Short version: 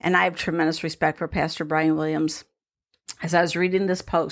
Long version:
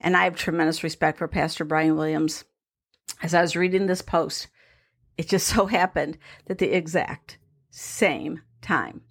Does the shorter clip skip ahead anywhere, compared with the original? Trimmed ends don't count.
no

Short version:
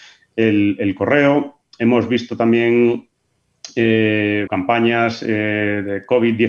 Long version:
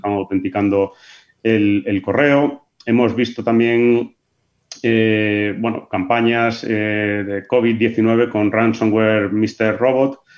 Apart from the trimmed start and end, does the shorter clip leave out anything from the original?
yes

